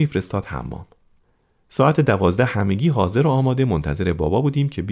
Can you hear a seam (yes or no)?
no